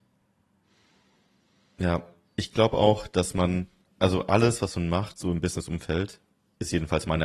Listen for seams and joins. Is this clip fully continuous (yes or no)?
yes